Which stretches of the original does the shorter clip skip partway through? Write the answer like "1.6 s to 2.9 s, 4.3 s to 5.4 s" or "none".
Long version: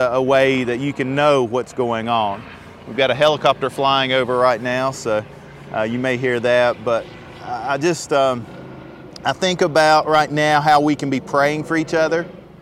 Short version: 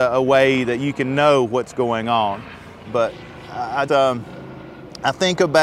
2.8 s to 6.8 s, 7.8 s to 8.1 s